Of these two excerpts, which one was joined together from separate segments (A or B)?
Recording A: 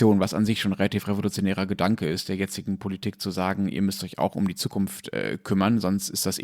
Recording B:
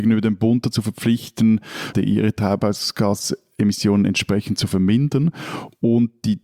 B